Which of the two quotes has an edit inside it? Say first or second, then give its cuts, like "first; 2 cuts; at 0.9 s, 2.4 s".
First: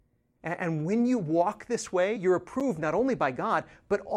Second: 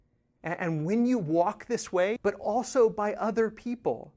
second; 1 cut; at 2.2 s